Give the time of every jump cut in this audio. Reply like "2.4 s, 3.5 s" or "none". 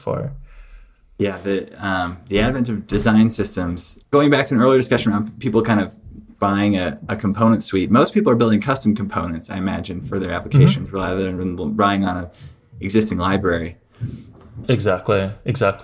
14.6 s